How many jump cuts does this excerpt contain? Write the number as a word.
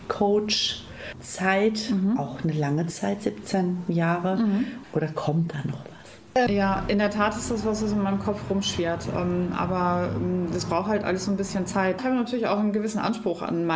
three